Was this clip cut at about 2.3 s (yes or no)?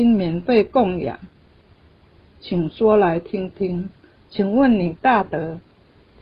no